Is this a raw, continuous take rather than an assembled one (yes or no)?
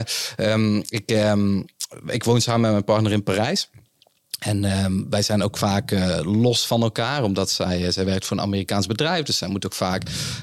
yes